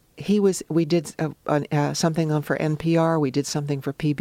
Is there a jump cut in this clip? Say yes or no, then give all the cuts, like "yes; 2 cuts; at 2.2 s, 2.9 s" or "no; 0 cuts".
no; 0 cuts